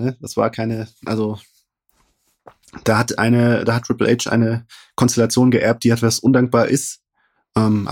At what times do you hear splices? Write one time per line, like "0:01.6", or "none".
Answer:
none